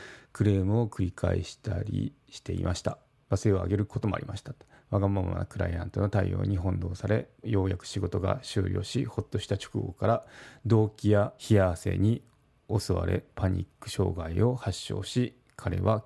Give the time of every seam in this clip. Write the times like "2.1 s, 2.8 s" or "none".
3.2 s, 7.4 s, 11.4 s

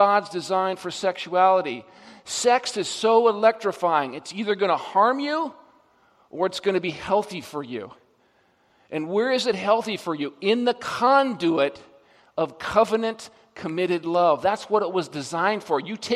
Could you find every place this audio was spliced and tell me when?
none

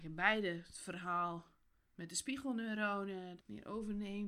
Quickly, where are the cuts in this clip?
3.4 s

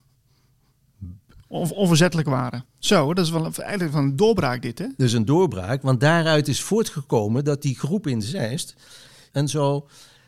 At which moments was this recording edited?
1.4 s, 2.7 s, 9.3 s

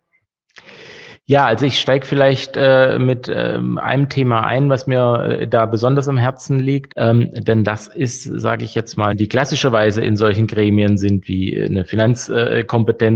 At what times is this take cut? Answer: 6.9 s, 9.1 s

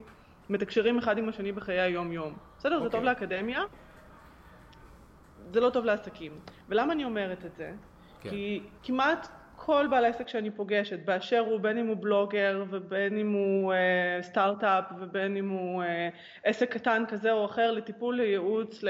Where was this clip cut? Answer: 8.8 s

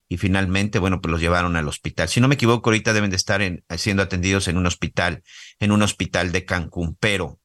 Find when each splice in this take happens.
none

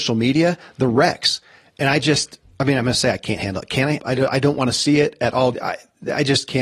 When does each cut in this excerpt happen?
4.0 s, 5.5 s

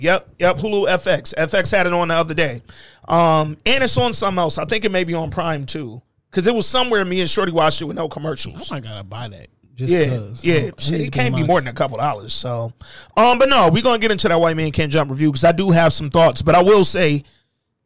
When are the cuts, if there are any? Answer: none

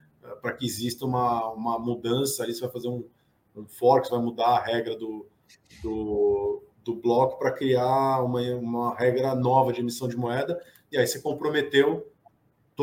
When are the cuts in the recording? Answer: none

